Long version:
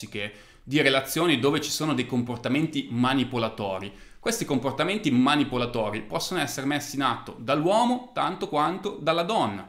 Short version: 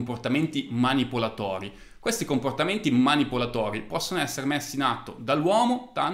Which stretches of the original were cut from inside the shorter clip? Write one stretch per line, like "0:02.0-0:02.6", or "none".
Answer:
none